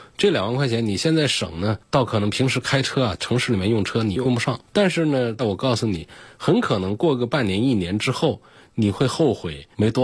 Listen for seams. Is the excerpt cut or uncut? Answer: cut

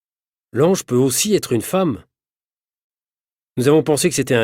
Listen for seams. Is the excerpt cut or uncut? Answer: uncut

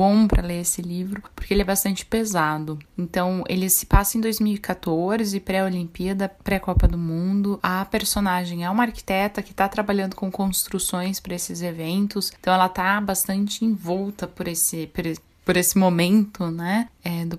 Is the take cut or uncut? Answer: uncut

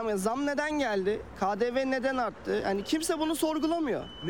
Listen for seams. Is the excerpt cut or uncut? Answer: uncut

